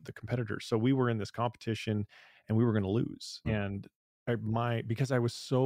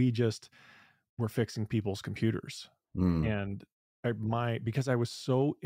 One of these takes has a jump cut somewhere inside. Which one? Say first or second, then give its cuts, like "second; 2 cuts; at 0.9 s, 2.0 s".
first; 1 cut; at 3.4 s